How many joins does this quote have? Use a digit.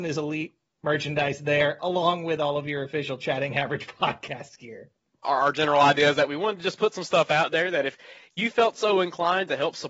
1